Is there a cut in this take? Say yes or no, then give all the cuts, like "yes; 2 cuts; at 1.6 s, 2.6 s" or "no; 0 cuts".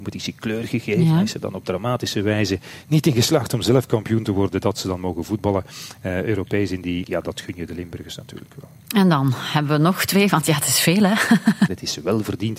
yes; 2 cuts; at 7.0 s, 11.7 s